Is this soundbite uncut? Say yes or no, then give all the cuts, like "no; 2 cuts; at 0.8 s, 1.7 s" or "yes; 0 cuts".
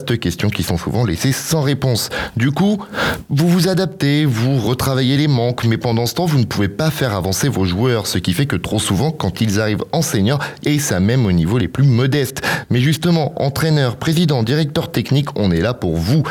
no; 1 cut; at 10.6 s